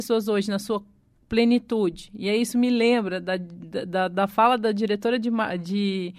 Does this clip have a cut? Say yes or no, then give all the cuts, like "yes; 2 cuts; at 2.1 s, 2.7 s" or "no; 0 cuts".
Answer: no; 0 cuts